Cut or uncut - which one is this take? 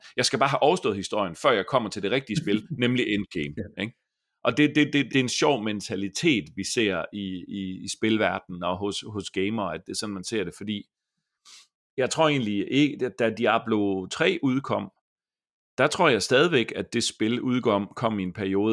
cut